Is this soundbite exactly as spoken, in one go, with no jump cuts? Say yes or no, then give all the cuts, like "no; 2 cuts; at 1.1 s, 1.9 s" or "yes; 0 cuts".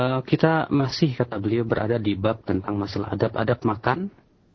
yes; 0 cuts